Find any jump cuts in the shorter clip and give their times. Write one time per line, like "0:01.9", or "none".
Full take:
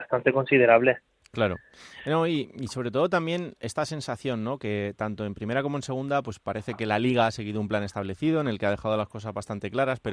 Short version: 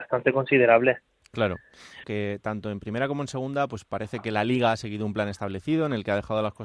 0:02.0